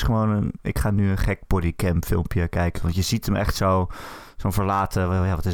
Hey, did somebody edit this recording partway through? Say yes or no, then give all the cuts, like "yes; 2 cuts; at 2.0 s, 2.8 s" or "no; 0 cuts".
yes; 1 cut; at 2.7 s